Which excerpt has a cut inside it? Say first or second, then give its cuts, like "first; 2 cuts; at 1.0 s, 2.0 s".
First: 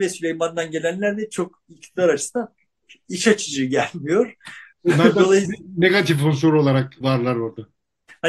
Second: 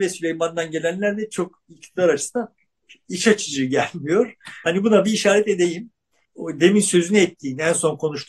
second; 1 cut; at 4.6 s